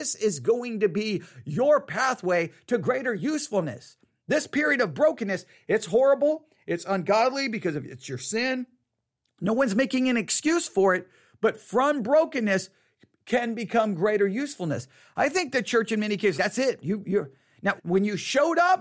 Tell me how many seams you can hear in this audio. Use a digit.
2